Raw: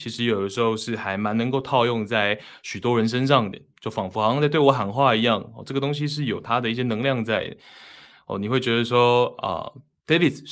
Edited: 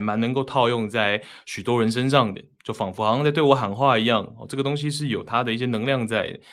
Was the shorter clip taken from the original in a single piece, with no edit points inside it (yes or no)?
yes